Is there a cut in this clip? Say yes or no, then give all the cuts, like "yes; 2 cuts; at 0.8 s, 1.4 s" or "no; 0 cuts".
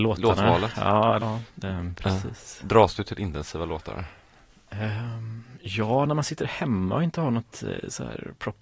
yes; 1 cut; at 1.2 s